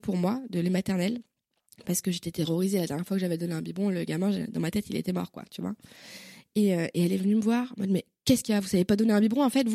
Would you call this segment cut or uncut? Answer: uncut